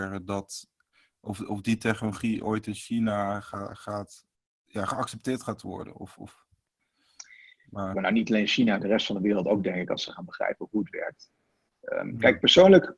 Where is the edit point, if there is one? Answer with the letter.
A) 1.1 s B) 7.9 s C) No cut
B